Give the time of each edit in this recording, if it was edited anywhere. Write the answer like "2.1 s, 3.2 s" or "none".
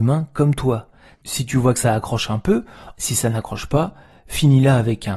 1.1 s, 2.9 s